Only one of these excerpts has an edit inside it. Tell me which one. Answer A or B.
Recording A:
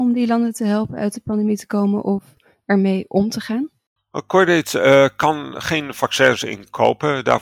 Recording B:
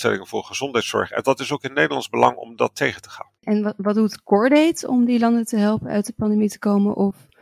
B